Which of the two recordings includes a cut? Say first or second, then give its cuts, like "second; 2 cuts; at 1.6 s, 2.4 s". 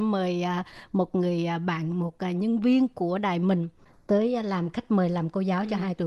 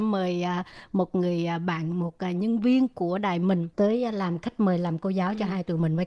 second; 1 cut; at 3.7 s